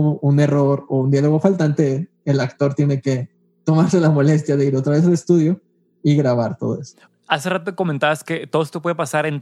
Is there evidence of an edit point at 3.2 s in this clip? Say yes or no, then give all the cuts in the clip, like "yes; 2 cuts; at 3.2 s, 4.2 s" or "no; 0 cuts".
no; 1 cut; at 7.0 s